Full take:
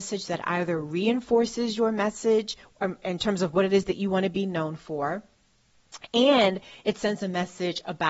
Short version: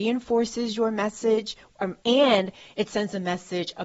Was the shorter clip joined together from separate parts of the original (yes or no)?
yes